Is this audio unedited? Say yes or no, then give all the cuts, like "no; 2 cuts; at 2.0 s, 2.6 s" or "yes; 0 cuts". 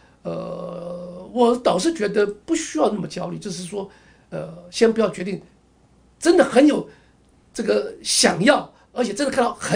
yes; 0 cuts